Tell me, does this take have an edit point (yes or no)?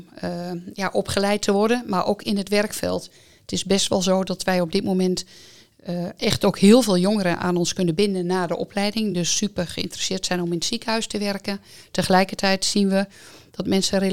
no